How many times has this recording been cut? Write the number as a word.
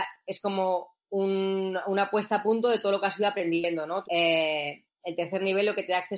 one